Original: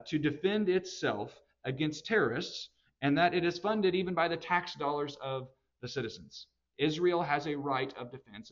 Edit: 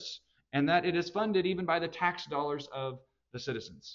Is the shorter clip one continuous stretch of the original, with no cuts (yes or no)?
yes